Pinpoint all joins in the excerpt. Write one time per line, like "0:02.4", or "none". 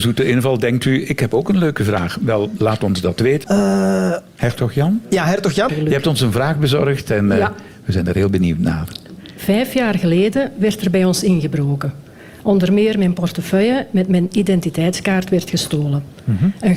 0:03.4
0:05.7